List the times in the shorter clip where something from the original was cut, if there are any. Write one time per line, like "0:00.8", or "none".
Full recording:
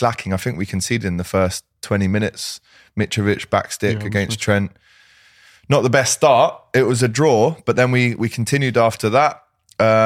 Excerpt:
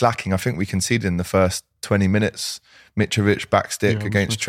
none